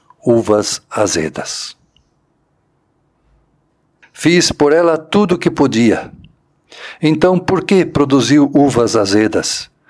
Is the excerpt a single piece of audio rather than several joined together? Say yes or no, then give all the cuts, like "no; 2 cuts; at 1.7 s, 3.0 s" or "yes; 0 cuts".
no; 1 cut; at 4.0 s